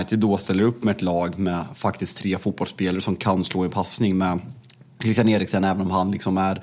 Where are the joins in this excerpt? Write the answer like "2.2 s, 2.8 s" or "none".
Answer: none